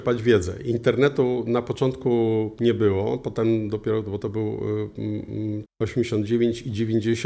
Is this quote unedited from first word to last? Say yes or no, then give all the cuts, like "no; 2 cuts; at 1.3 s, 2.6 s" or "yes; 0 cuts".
no; 2 cuts; at 4.2 s, 5.6 s